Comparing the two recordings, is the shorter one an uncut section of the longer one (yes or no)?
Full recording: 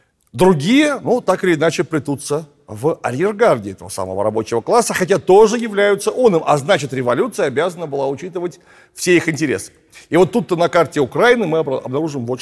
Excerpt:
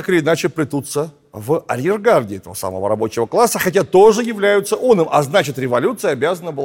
yes